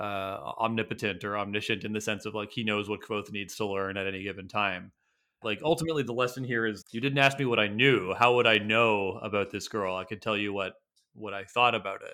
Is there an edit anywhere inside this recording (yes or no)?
yes